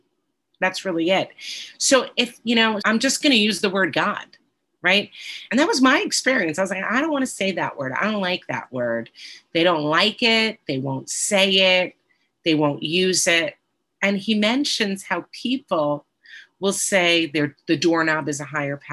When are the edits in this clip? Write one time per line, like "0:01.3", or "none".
0:02.8
0:05.5